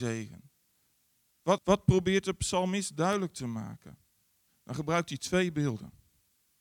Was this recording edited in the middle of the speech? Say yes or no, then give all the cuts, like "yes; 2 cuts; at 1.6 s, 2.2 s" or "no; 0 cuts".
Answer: yes; 2 cuts; at 1.6 s, 4.5 s